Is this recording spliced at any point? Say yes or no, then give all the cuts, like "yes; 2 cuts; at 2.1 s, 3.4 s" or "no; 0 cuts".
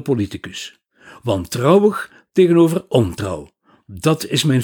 no; 0 cuts